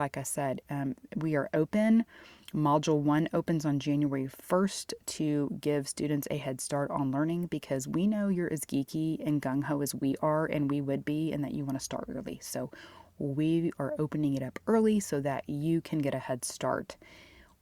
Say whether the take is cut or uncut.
uncut